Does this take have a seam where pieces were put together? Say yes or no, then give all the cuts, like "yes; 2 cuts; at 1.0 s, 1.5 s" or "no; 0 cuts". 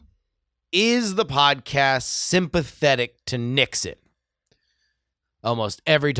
yes; 1 cut; at 5.2 s